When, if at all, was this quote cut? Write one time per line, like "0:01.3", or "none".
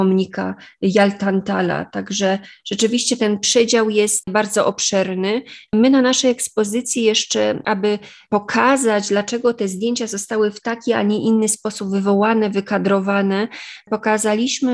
0:05.7